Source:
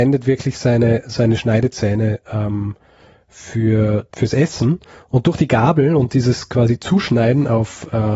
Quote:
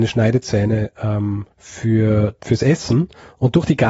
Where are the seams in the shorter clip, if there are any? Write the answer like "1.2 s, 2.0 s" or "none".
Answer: 1.5 s